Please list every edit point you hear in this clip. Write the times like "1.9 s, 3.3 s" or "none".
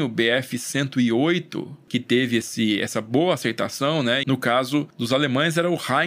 4.2 s